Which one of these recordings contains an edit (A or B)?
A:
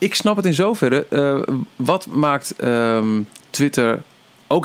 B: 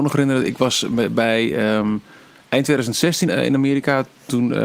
B